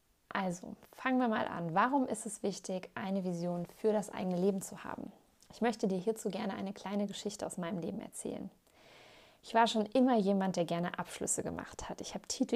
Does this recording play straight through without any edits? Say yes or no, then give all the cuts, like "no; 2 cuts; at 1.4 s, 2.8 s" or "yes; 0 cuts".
yes; 0 cuts